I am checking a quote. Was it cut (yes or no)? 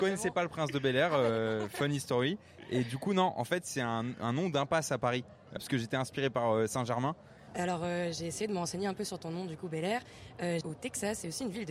yes